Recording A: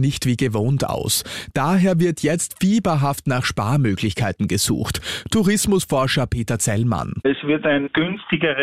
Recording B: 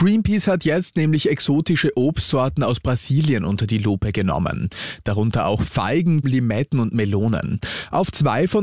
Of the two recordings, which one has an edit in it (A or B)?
B